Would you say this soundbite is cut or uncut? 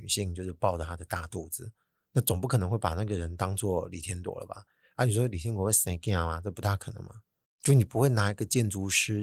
uncut